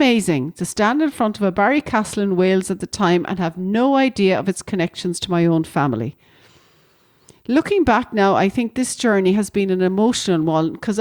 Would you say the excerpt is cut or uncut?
uncut